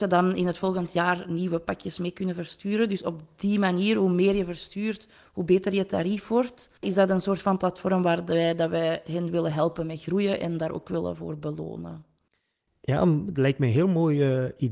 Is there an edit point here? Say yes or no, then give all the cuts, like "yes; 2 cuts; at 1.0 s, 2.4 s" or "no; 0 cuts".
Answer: yes; 1 cut; at 6.8 s